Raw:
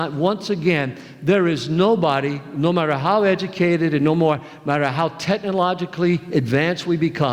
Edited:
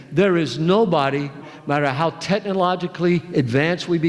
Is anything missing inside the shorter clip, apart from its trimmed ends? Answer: yes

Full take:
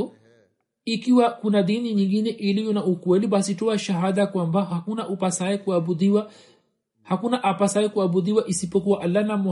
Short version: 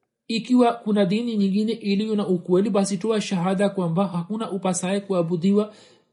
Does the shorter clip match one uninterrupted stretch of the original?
yes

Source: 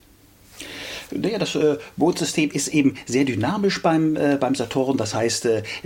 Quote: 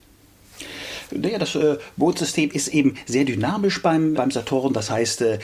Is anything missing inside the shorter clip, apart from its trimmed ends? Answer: yes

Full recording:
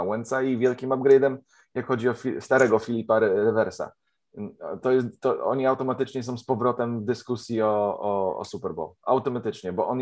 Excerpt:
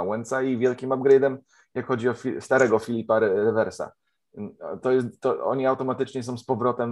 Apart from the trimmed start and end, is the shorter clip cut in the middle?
no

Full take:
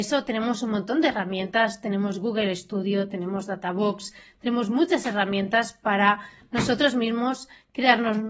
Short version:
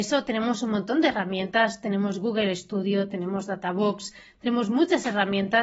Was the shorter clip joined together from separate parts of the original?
no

